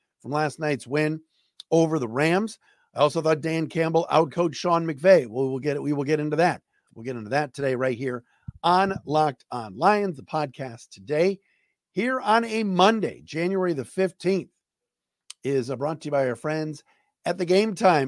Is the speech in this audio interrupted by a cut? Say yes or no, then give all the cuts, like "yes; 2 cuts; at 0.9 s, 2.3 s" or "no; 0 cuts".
yes; 1 cut; at 6.9 s